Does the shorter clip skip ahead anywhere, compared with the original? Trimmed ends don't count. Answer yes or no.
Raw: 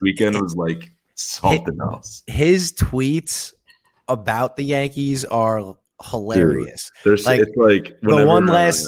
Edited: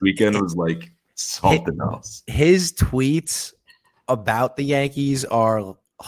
no